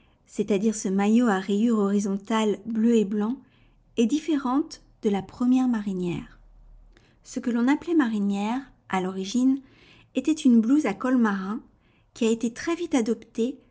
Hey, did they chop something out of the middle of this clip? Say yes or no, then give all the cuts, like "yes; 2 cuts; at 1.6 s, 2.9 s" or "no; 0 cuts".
no; 0 cuts